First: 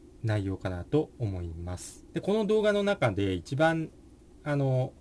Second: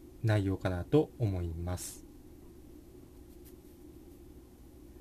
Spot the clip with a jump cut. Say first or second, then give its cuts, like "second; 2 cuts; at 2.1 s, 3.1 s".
first; 1 cut; at 2.1 s